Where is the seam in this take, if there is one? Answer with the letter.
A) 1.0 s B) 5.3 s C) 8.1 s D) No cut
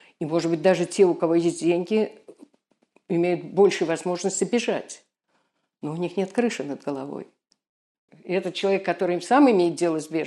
C